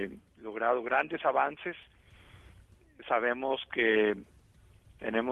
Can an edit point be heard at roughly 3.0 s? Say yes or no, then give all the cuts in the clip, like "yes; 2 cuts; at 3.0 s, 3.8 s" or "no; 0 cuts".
no; 0 cuts